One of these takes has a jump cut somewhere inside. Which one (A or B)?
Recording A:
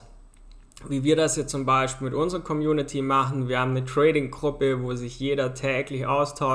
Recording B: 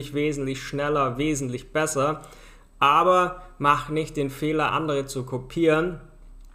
B